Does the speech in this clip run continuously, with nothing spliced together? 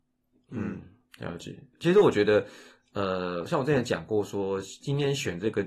yes; 0 cuts

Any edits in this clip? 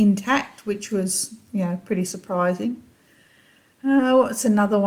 no; 0 cuts

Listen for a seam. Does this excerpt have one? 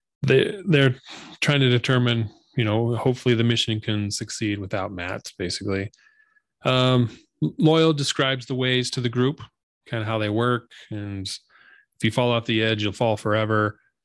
no; 0 cuts

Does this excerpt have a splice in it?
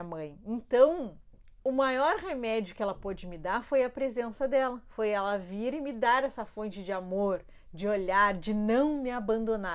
no; 0 cuts

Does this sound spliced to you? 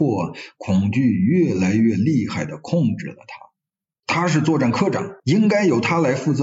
yes; 1 cut; at 4.0 s

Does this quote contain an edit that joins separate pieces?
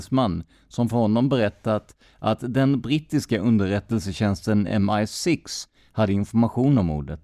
no; 0 cuts

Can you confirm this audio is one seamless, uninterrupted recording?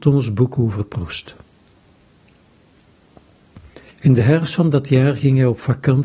no; 1 cut; at 3.9 s

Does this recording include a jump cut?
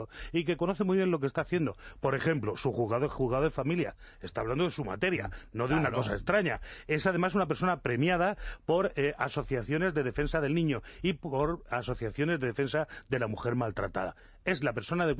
no; 0 cuts

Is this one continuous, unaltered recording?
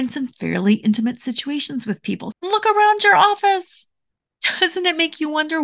no; 1 cut; at 2.3 s

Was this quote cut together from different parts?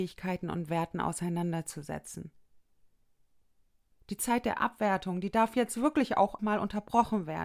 yes; 2 cuts; at 3.9 s, 6.4 s

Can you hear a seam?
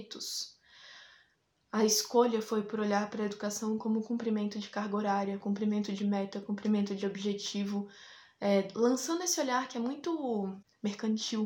no; 0 cuts

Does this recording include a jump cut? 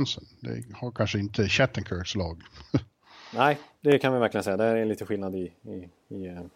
no; 0 cuts

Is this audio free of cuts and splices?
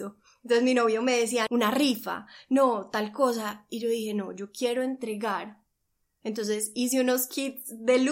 no; 1 cut; at 1.5 s

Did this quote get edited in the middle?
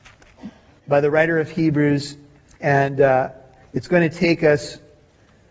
no; 0 cuts

